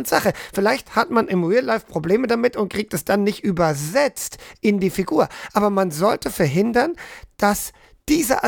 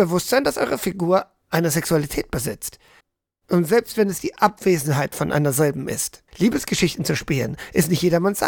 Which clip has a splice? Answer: second; 1 cut; at 6.3 s

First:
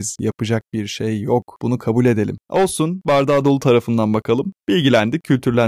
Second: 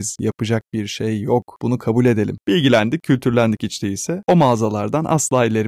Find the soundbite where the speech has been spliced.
second; 2 cuts; at 2.4 s, 4.2 s

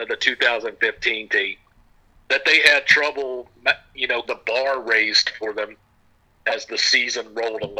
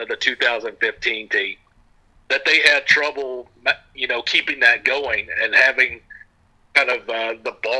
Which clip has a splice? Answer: first; 1 cut; at 4.2 s

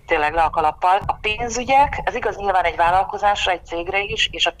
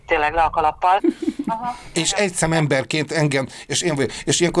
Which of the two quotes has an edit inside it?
second; 1 cut; at 1.0 s

